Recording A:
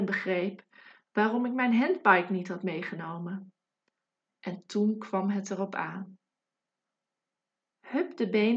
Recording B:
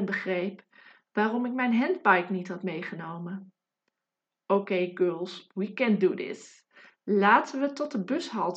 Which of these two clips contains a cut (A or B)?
A